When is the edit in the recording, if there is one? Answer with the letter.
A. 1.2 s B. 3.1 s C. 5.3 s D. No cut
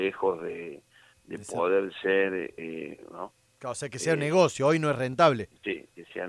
B